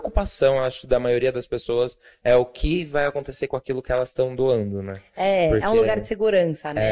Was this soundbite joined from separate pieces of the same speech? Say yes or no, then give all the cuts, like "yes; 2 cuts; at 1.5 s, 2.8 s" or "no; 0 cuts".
no; 0 cuts